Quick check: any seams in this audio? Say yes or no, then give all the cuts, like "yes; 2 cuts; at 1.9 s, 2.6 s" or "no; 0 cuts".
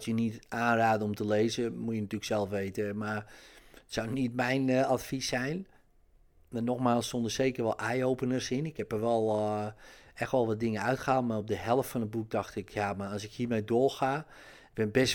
no; 0 cuts